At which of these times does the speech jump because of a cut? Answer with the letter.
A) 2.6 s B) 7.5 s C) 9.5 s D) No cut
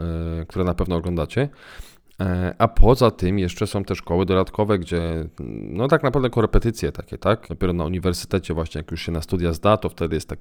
B